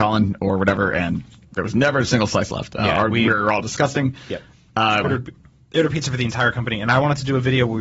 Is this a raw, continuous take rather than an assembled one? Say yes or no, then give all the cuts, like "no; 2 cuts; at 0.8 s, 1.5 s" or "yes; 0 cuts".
no; 1 cut; at 5.0 s